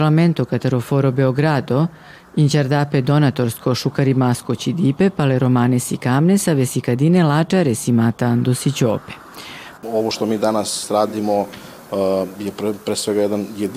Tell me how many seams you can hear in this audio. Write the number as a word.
one